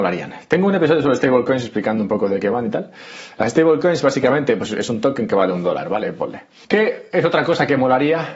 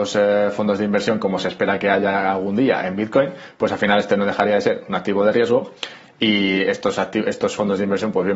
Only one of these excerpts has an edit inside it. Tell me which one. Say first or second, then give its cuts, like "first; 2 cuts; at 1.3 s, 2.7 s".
first; 2 cuts; at 4.7 s, 6.6 s